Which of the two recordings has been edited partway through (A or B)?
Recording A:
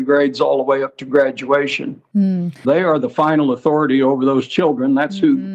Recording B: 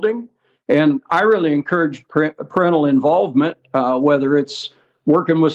A